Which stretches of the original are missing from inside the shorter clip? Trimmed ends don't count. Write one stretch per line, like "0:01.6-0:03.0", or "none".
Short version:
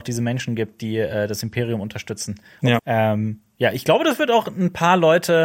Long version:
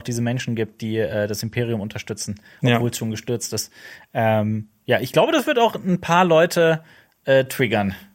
0:02.8-0:04.1